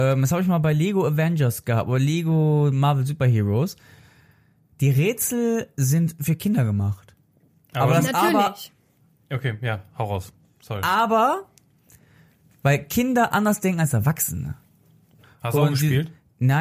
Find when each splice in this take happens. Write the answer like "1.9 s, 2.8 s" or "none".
15.2 s